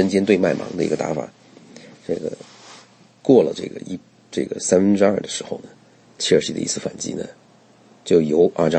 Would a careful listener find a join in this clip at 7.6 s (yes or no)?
no